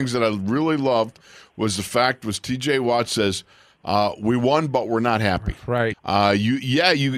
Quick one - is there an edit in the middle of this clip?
yes; 1 cut; at 5.9 s

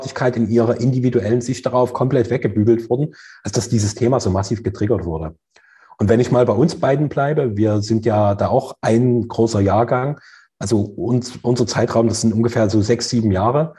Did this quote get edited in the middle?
no; 0 cuts

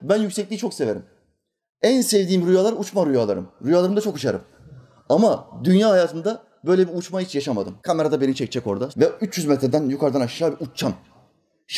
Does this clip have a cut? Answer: yes; 2 cuts; at 7.8 s, 8.9 s

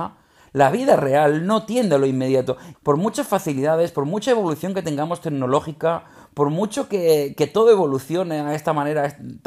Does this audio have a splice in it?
yes; 1 cut; at 2.7 s

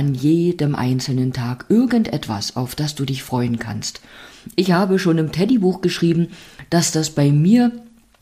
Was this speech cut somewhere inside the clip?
no; 0 cuts

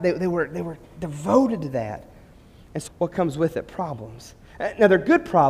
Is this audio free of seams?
no; 1 cut; at 2.9 s

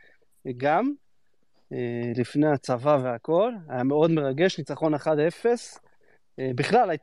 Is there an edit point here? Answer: no; 0 cuts

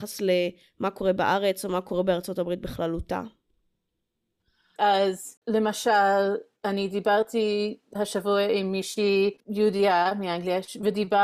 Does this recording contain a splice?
yes; 2 cuts; at 4.8 s, 9.4 s

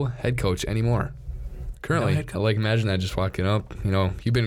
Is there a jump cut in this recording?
yes; 1 cut; at 2.4 s

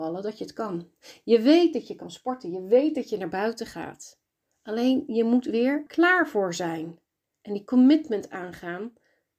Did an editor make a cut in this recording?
yes; 1 cut; at 5.9 s

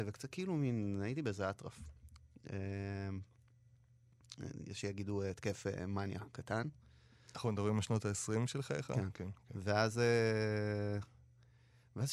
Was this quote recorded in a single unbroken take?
yes; 0 cuts

